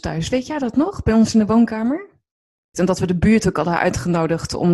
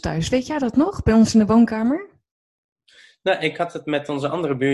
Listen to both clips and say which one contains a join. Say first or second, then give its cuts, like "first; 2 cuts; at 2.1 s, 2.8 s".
first; 1 cut; at 2.7 s